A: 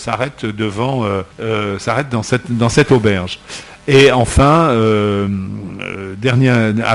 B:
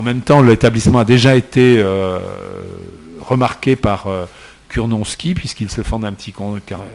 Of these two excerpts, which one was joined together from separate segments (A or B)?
A